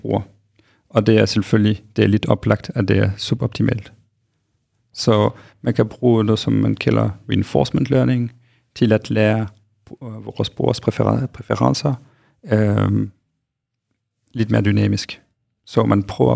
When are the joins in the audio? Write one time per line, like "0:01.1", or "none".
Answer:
none